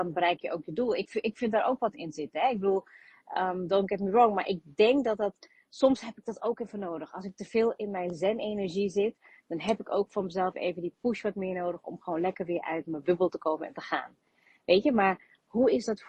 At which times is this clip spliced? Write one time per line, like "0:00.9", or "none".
0:01.1